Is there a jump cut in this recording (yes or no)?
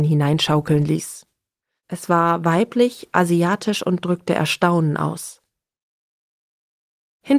yes